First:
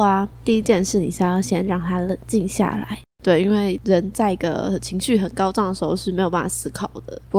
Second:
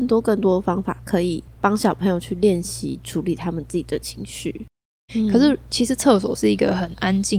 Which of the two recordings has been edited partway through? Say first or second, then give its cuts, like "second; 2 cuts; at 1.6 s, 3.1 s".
second; 1 cut; at 5.1 s